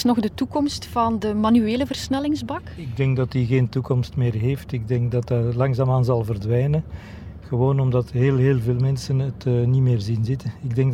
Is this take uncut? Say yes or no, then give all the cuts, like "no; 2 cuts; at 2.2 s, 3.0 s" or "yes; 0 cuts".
yes; 0 cuts